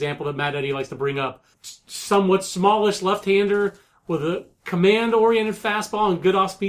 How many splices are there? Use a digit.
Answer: 1